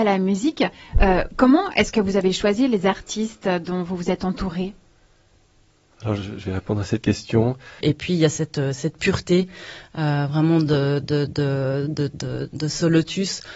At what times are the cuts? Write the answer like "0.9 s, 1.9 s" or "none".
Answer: 7.8 s